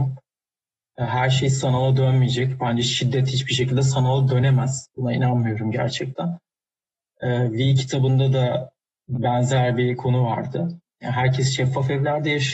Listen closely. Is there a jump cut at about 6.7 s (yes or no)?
no